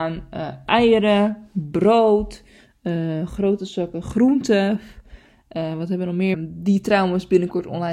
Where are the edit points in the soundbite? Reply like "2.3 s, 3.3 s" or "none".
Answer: 6.3 s